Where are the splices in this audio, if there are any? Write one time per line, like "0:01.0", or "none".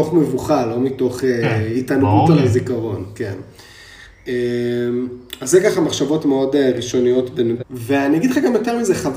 0:07.6